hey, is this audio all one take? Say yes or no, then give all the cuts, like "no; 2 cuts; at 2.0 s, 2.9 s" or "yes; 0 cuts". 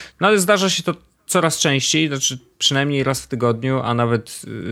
yes; 0 cuts